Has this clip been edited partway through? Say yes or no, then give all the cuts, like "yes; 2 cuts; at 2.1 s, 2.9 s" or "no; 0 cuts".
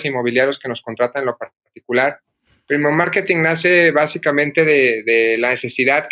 no; 0 cuts